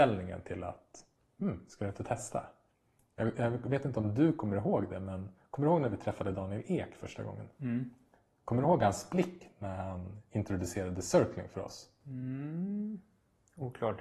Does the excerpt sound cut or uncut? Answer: uncut